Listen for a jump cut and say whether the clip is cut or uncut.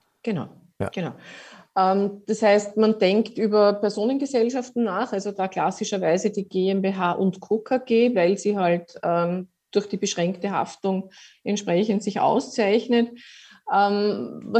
uncut